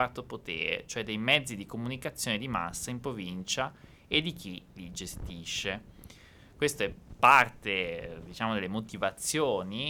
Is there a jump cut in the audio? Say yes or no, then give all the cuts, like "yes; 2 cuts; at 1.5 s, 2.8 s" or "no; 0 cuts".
no; 0 cuts